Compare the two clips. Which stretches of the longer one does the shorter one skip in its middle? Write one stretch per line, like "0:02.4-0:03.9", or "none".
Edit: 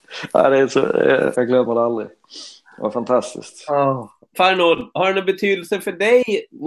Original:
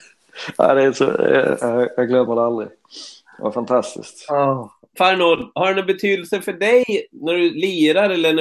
0:01.6-0:02.0